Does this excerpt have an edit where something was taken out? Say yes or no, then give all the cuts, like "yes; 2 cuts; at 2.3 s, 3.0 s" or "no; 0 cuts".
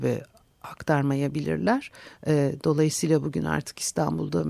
yes; 1 cut; at 2.2 s